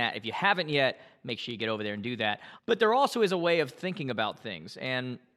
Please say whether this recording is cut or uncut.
cut